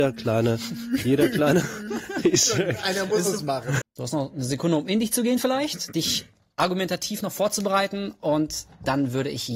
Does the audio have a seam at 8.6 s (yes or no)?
no